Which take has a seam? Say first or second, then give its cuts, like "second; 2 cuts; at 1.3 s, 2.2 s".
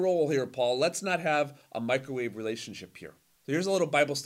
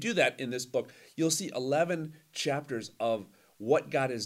first; 1 cut; at 3.3 s